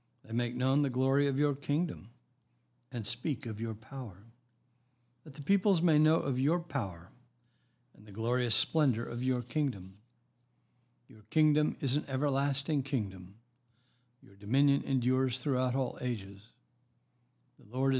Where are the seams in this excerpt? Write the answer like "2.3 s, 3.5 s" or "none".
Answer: none